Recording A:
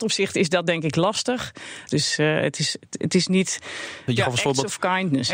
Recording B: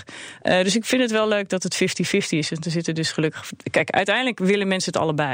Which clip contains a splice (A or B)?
A